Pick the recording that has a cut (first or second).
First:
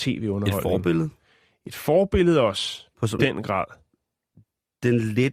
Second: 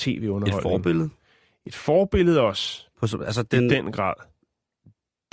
first